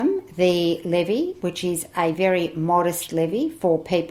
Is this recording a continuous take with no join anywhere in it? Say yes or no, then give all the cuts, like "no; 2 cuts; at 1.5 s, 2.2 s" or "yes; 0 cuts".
yes; 0 cuts